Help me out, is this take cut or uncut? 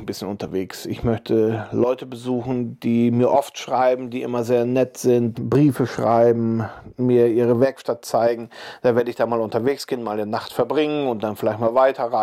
cut